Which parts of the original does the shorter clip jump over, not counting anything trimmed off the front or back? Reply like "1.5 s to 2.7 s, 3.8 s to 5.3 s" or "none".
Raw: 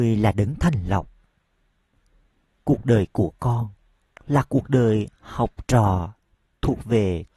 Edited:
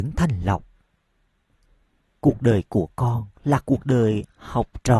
3.8 s to 4.2 s